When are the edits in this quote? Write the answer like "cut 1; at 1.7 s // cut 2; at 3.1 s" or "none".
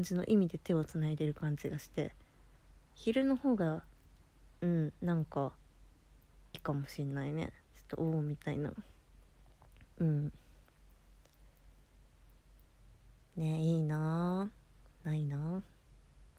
cut 1; at 6.5 s